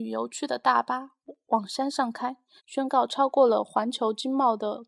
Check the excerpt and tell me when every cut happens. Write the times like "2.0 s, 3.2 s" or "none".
2.6 s